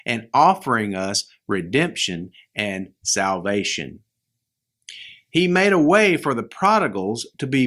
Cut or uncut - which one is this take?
uncut